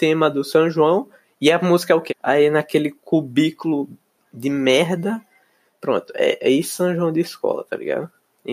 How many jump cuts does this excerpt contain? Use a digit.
2